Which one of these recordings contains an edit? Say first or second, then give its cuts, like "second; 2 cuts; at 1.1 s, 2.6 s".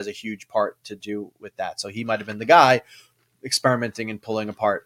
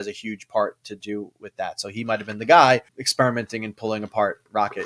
second; 1 cut; at 2.9 s